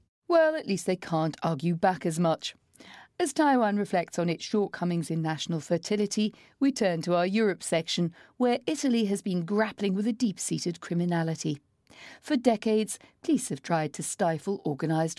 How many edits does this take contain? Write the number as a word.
zero